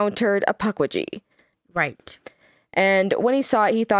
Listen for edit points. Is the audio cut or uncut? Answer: cut